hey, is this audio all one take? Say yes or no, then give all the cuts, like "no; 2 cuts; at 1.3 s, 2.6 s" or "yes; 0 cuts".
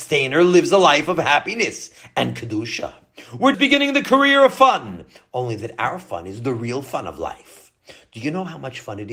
no; 1 cut; at 3.5 s